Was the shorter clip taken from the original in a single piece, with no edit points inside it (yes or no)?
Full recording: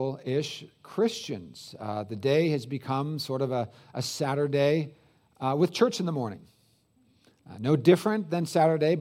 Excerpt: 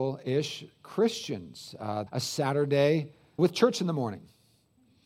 no